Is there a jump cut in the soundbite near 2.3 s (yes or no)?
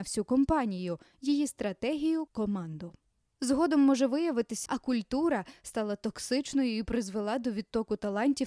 yes